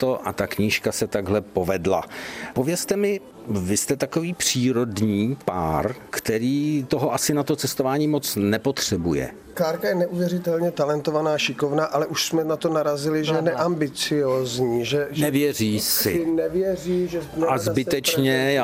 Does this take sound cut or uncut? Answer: cut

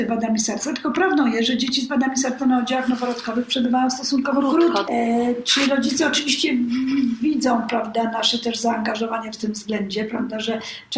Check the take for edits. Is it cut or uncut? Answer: cut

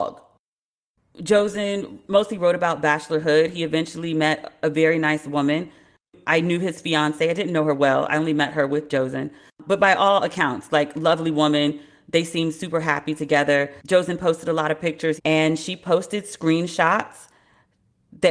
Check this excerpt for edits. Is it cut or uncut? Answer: cut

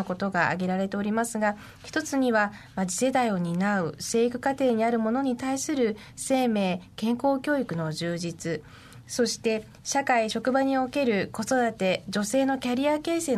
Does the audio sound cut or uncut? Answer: uncut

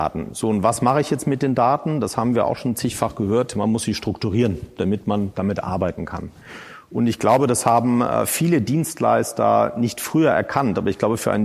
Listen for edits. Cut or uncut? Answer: uncut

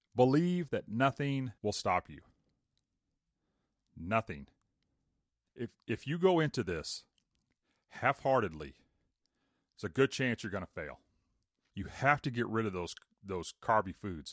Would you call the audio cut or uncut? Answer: cut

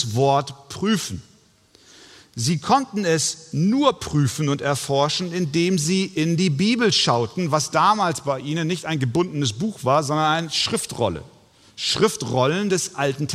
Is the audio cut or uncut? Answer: uncut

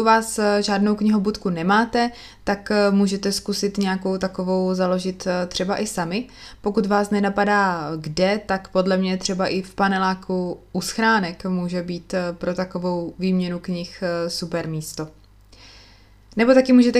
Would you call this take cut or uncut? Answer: uncut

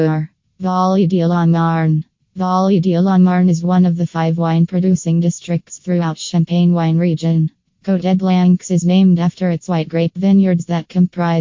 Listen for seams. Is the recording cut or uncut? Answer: cut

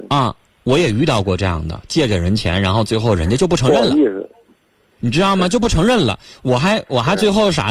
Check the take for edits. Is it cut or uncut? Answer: uncut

